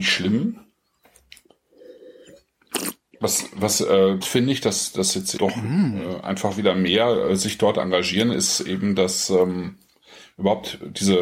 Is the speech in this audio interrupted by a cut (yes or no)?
yes